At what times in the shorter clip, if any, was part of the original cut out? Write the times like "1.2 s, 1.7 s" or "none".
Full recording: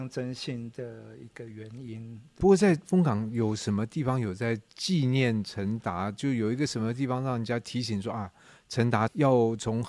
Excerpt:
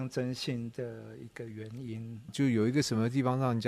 2.3 s